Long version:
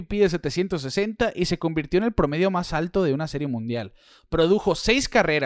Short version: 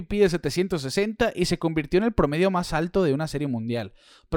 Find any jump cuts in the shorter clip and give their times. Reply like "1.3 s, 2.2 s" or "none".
none

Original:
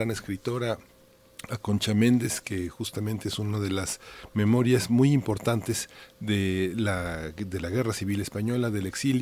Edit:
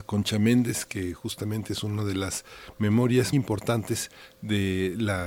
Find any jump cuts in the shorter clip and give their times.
3.3 s

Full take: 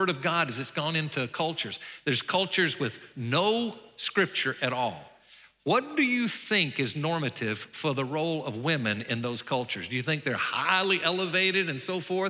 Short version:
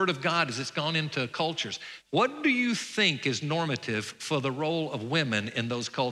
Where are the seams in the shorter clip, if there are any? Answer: 2.0 s

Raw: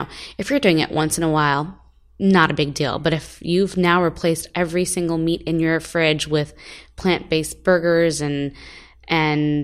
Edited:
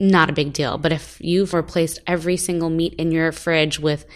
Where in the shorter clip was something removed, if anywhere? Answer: 1.5 s

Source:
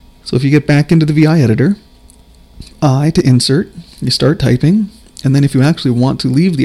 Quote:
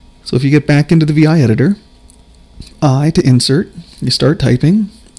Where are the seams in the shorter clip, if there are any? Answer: none

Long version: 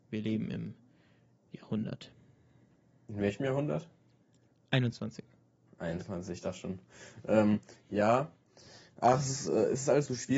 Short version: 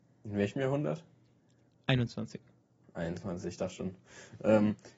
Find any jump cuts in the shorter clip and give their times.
none

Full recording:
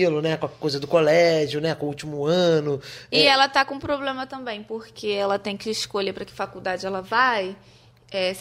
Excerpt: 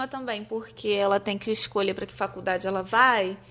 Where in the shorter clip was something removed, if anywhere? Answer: none

